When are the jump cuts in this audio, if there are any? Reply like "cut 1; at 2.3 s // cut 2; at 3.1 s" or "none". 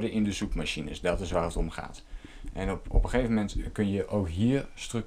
cut 1; at 2.8 s